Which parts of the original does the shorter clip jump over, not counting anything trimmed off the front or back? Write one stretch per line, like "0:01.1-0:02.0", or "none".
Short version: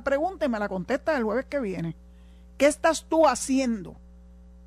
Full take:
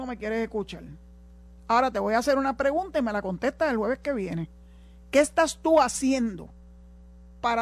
none